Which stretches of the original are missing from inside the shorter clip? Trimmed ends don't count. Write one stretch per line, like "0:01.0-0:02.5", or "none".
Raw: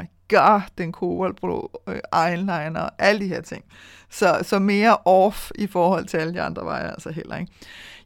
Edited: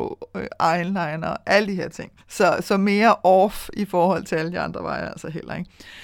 0:03.7-0:04.0